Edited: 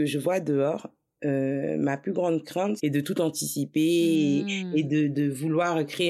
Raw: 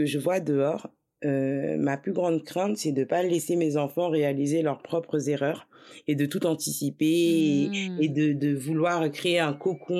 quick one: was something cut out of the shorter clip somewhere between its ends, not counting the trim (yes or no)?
yes